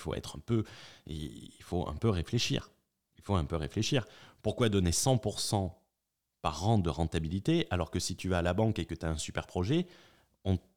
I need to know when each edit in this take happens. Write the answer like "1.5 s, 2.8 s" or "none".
none

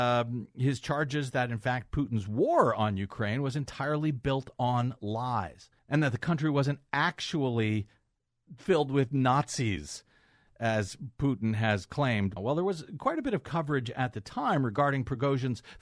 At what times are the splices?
5.8 s, 12.4 s

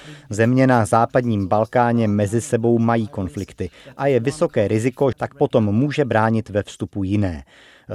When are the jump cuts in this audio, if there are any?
5.1 s

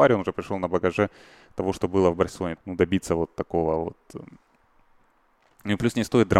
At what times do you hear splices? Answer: 2.6 s

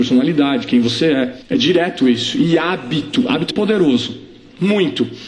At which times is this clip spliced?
3.5 s

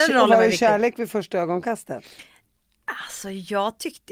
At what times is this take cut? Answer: none

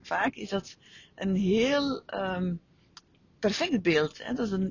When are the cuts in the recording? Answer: none

